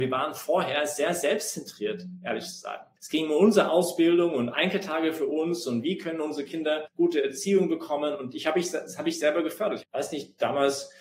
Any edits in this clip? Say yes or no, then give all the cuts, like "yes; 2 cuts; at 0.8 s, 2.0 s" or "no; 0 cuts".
yes; 1 cut; at 9.8 s